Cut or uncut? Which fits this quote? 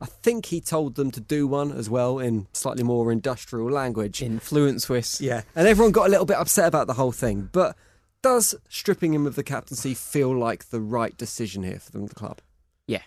uncut